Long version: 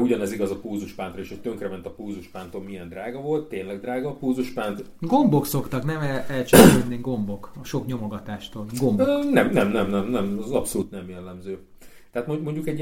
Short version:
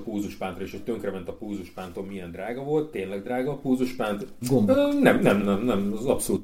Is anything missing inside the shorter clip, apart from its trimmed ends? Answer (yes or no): yes